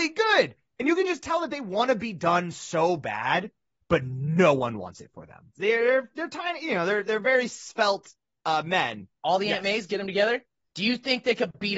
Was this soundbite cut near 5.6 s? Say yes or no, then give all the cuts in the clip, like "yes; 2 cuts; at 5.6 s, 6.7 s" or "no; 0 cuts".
yes; 2 cuts; at 5.6 s, 9.2 s